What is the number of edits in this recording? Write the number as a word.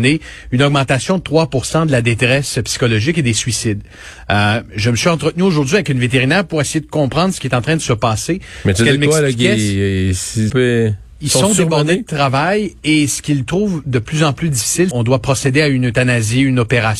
two